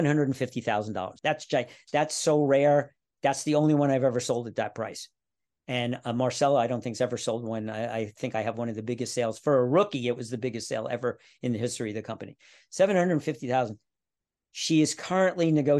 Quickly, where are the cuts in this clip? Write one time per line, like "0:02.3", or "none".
0:01.2